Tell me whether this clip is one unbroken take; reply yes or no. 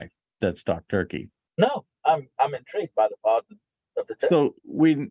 no